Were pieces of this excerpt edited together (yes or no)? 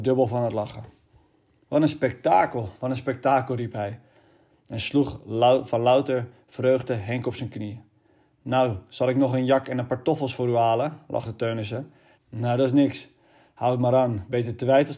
yes